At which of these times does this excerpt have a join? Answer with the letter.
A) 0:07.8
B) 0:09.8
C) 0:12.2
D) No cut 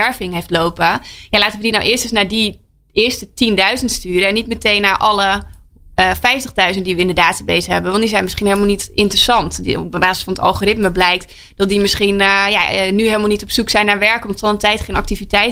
D